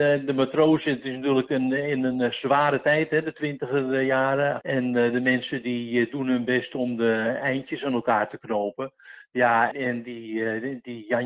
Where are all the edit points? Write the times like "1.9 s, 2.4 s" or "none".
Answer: 4.6 s, 9.7 s